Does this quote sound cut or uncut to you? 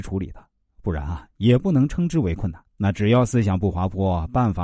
cut